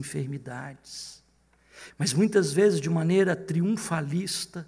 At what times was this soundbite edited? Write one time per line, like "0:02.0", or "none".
0:01.9